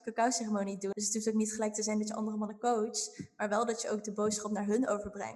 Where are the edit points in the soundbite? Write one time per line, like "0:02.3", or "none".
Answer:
0:00.9